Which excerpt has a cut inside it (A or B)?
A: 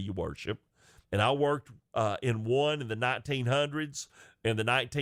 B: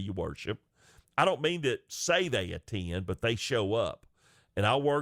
A